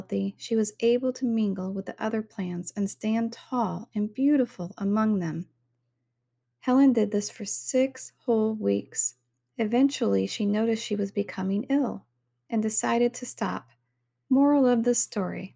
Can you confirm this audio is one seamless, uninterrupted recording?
no; 2 cuts; at 6.4 s, 14.3 s

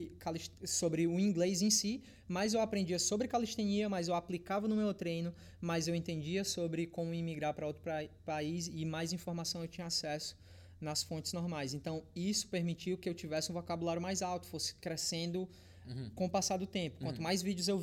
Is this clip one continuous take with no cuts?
yes; 0 cuts

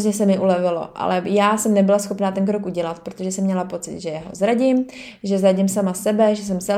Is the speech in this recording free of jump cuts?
yes; 0 cuts

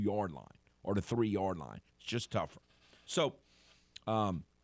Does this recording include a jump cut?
yes; 1 cut; at 1.9 s

